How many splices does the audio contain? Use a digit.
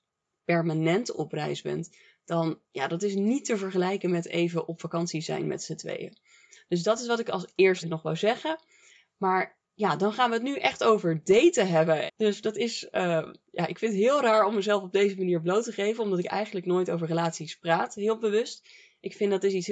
2